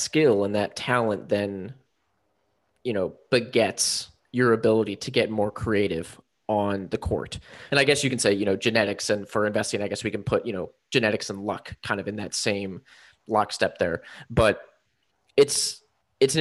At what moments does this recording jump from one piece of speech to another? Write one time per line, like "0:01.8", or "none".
0:07.7